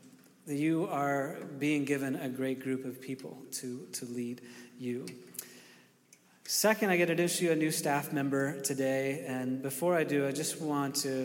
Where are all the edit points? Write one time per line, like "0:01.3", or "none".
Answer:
none